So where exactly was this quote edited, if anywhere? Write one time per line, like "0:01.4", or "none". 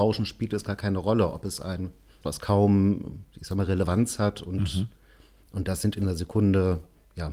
0:02.2
0:05.5